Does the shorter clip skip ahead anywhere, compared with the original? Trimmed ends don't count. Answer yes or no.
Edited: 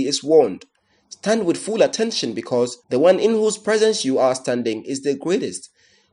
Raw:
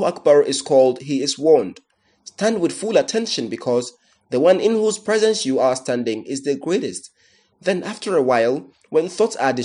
yes